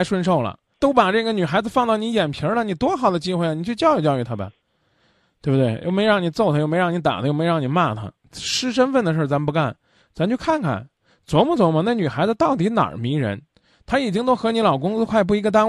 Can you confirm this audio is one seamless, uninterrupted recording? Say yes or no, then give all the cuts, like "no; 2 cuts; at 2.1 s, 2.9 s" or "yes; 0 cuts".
yes; 0 cuts